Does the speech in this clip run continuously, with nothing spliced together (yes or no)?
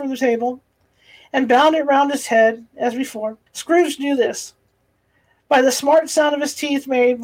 no